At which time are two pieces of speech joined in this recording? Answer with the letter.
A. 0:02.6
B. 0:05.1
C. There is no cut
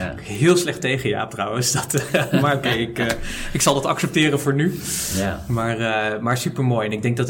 C